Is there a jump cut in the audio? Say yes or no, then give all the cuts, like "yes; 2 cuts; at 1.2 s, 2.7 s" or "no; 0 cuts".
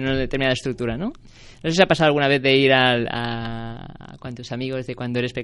no; 0 cuts